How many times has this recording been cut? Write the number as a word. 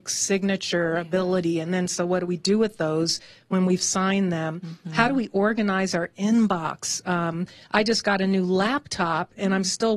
zero